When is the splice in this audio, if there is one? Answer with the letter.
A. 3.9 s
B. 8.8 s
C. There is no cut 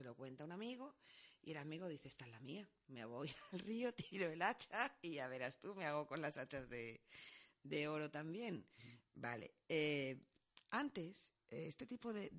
B